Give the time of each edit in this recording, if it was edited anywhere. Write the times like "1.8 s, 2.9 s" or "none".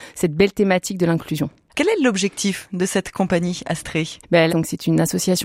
1.7 s, 4.5 s